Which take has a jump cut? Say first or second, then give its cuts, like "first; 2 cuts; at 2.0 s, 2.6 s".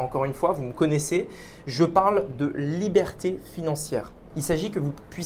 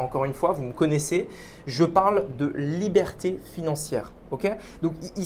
first; 1 cut; at 4.3 s